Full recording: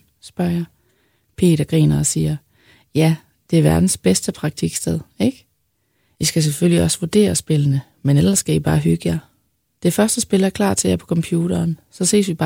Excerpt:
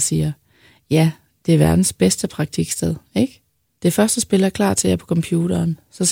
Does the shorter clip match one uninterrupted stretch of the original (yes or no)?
no